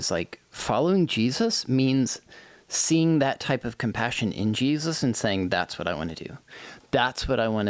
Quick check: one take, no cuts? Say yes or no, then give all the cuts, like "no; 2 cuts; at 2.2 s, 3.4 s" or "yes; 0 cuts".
yes; 0 cuts